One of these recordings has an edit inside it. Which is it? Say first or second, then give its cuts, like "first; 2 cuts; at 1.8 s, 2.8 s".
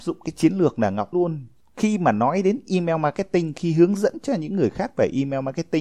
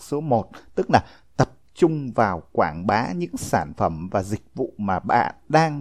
first; 1 cut; at 1.1 s